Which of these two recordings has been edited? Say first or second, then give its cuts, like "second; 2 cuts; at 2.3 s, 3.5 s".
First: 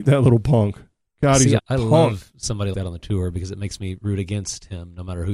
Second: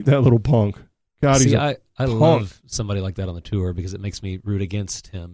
first; 2 cuts; at 1.6 s, 2.7 s